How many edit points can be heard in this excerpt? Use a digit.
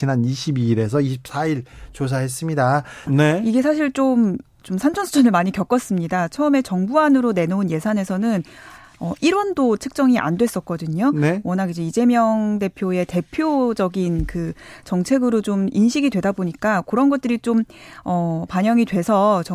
1